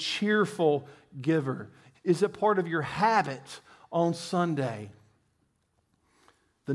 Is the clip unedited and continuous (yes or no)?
no